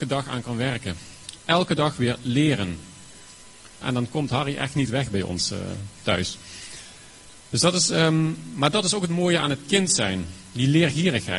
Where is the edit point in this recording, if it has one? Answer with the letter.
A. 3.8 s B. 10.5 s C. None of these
A